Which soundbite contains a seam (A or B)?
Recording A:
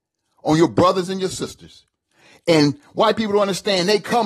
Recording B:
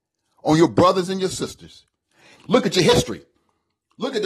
B